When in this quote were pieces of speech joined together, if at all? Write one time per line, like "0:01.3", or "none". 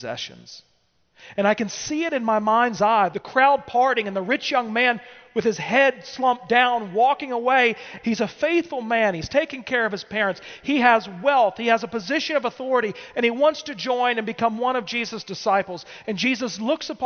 0:03.1
0:08.0